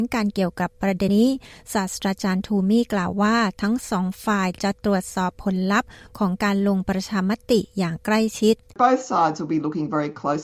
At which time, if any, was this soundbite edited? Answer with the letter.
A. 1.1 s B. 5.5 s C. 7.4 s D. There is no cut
A